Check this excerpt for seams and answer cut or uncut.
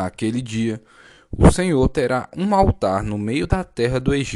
uncut